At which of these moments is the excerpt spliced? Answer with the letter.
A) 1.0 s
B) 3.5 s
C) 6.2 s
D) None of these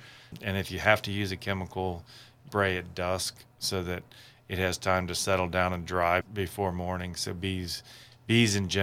C